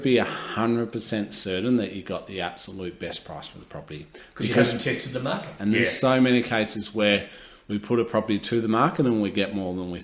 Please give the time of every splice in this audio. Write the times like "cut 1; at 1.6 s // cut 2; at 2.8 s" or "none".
cut 1; at 5.6 s